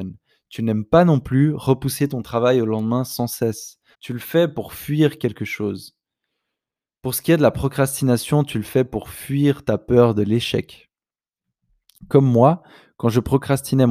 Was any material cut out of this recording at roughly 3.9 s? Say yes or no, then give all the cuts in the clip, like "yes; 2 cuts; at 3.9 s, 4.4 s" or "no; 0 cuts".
yes; 1 cut; at 3.9 s